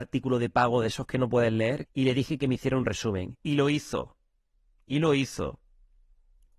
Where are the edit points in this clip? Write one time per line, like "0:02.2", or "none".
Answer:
0:01.8